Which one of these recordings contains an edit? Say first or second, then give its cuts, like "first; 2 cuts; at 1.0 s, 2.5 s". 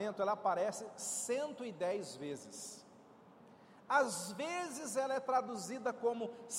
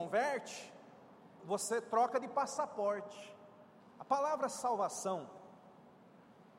second; 2 cuts; at 1.4 s, 3.8 s